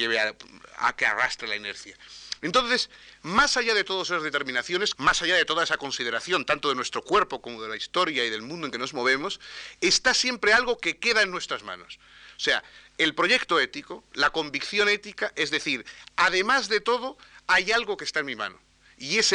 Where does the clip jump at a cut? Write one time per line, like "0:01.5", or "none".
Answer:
0:04.9